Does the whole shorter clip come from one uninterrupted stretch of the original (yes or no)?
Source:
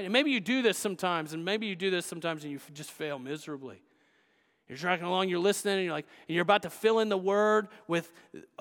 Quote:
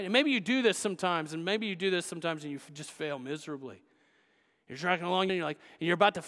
no